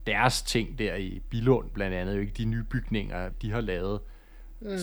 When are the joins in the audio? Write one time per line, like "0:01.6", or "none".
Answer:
0:03.3